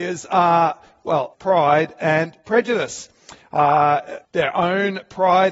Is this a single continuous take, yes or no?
no